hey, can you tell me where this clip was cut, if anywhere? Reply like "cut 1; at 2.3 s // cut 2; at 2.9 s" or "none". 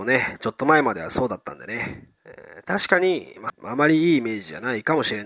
cut 1; at 2.1 s // cut 2; at 3.5 s